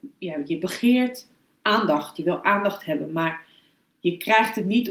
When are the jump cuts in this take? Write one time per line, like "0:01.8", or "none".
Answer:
none